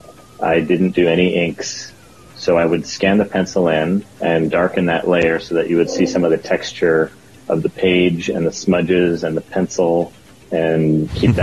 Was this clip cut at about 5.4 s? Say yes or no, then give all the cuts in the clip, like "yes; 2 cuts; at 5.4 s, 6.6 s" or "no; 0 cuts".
no; 1 cut; at 4.1 s